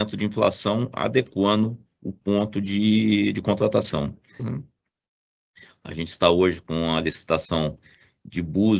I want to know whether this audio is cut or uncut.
cut